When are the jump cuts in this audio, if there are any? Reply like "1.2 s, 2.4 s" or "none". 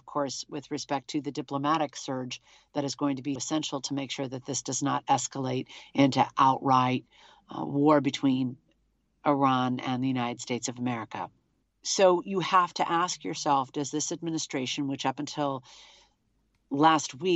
3.4 s, 11.6 s